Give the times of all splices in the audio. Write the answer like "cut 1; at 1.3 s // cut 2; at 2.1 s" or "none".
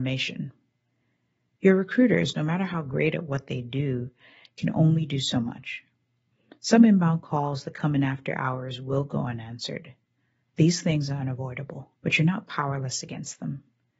cut 1; at 10.4 s // cut 2; at 11.9 s